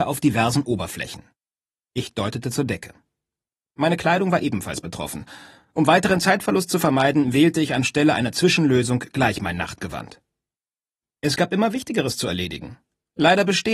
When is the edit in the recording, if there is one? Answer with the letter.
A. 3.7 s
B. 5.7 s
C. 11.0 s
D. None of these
C